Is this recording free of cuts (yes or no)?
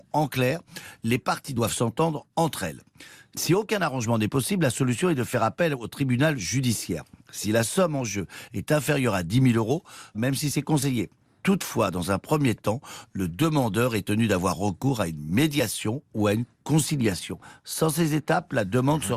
no